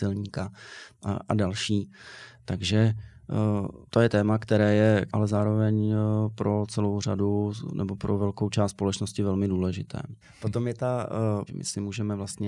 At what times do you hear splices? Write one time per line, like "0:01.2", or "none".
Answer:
0:03.9
0:05.1
0:11.5